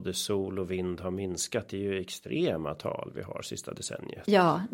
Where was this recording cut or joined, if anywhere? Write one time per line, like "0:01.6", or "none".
none